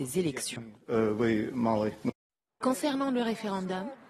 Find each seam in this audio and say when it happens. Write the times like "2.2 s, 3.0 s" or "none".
2.6 s